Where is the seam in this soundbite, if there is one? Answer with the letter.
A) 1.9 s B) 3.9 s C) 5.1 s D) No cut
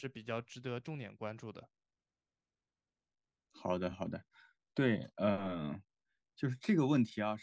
D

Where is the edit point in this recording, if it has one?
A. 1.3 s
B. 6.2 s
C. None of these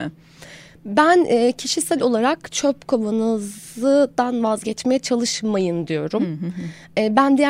C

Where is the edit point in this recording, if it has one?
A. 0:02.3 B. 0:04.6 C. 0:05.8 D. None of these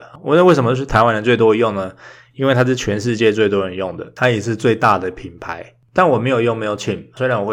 D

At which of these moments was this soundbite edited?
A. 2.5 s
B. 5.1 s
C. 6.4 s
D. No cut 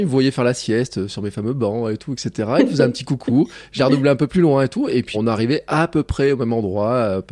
B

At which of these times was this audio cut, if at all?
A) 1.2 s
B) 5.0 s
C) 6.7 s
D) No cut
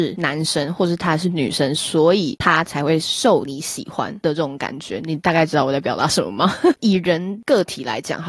C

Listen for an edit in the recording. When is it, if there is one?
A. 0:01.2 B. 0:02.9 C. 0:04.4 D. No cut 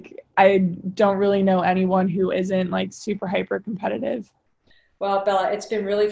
D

